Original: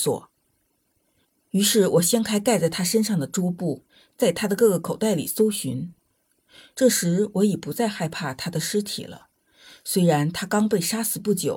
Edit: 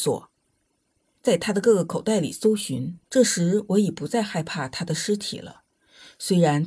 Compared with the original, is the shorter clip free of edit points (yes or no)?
no